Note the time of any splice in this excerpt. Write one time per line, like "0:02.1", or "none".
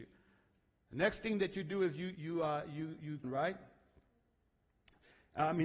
0:02.2
0:03.2